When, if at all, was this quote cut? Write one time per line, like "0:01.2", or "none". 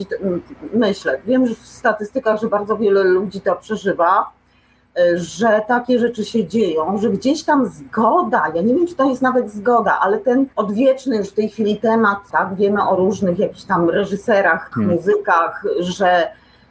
0:10.5
0:12.3
0:14.7